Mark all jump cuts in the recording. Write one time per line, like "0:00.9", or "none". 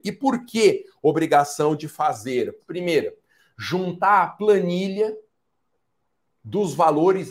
0:02.6